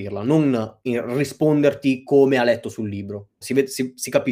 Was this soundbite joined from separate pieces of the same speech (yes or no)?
yes